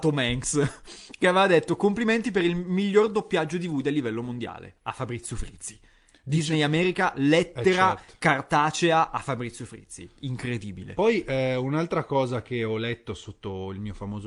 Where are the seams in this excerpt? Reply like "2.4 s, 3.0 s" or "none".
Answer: none